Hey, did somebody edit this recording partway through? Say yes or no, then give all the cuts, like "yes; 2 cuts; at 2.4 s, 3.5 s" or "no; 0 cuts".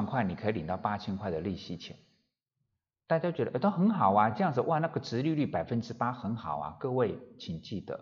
no; 0 cuts